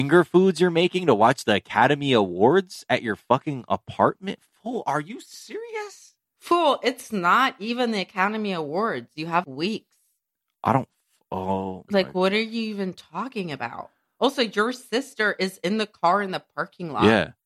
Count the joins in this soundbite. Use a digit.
1